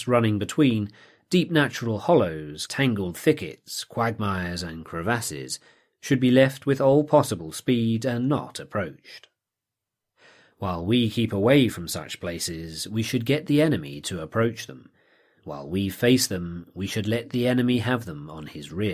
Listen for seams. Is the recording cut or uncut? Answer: cut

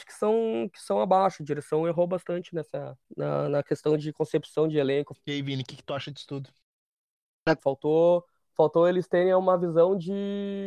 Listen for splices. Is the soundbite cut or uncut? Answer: cut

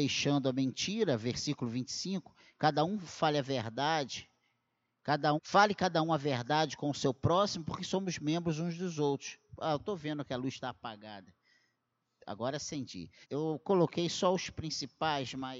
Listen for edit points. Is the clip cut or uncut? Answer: cut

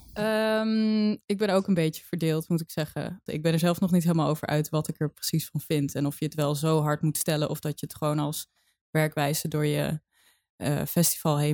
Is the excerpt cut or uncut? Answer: cut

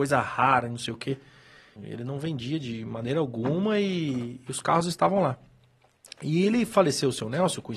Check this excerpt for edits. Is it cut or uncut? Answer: cut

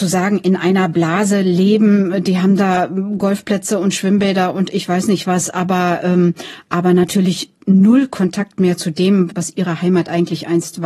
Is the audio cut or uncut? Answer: cut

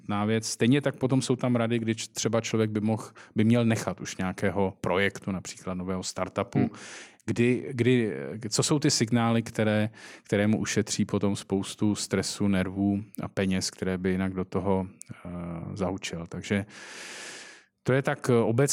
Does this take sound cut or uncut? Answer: uncut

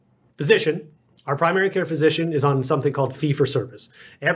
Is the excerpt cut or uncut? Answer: uncut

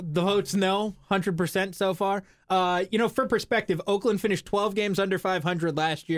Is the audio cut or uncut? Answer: uncut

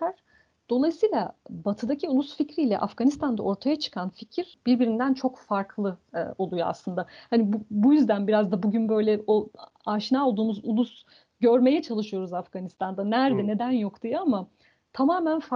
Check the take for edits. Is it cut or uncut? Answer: uncut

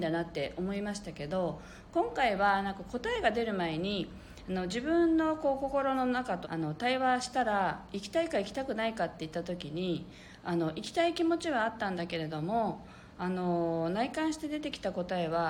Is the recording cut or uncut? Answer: cut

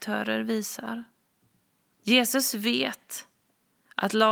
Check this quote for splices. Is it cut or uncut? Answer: cut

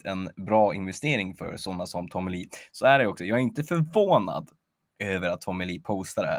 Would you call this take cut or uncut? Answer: uncut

